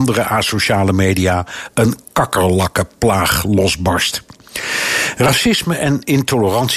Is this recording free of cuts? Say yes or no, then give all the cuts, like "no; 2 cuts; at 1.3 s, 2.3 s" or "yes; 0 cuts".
yes; 0 cuts